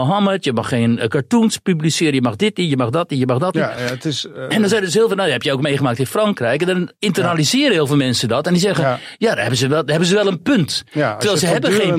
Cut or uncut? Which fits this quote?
uncut